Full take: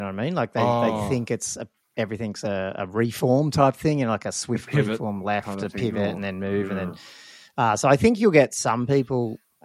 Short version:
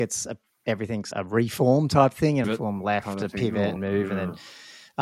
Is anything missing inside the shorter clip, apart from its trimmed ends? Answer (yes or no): yes